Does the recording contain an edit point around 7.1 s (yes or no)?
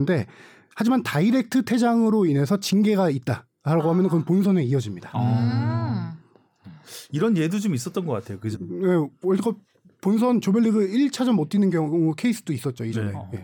no